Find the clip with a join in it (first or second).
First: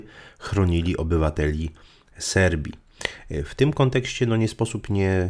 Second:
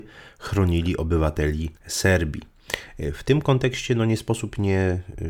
second